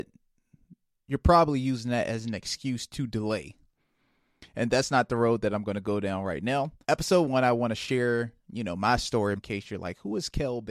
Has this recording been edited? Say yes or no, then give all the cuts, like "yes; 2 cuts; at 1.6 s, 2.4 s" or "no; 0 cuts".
yes; 2 cuts; at 6.8 s, 9.4 s